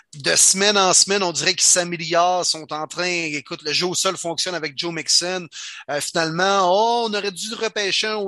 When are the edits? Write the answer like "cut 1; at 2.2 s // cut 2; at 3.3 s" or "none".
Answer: none